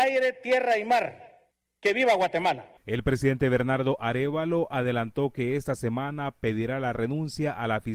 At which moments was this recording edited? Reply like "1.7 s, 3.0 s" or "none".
1.6 s